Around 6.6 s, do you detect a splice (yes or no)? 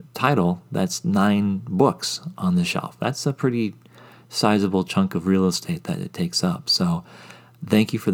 no